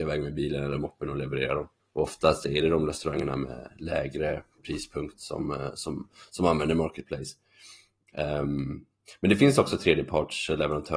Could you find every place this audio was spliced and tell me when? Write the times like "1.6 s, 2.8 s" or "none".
1.8 s

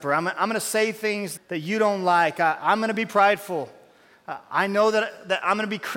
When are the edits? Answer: 1.4 s

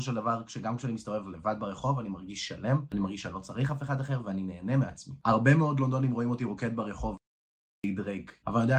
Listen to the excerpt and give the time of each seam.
none

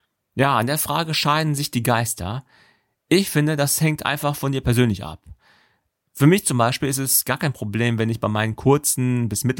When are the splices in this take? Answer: none

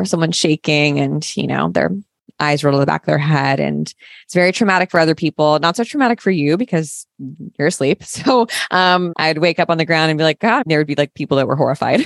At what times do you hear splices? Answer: 9.1 s, 10.6 s

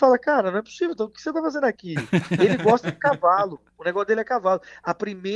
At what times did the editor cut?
none

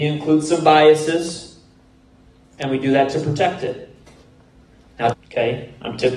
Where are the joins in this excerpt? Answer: 5.1 s

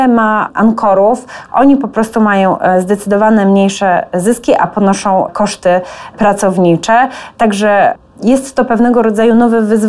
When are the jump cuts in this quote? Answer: 1.5 s

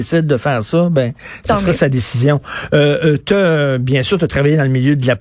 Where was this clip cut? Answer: none

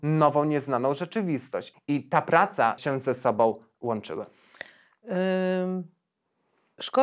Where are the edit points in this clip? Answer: 1.7 s, 2.8 s

